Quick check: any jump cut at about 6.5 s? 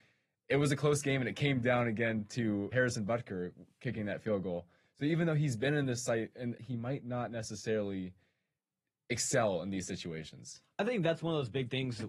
yes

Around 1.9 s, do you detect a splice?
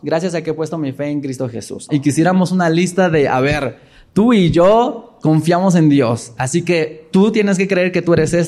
yes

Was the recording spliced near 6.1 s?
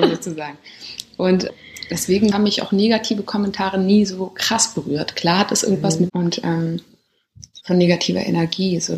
yes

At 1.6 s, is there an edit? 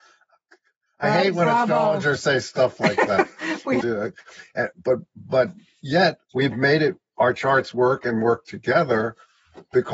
no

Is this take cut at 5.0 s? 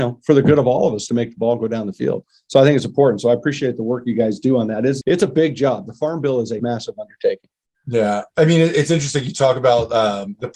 yes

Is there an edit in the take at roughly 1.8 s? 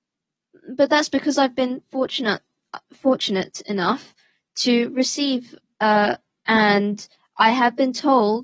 no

